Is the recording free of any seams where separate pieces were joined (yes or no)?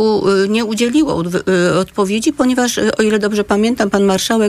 yes